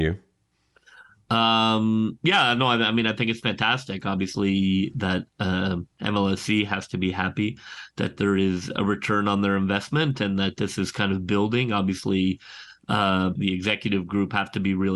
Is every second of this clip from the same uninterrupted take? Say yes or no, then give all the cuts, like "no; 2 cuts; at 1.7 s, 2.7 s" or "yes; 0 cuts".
no; 1 cut; at 13.4 s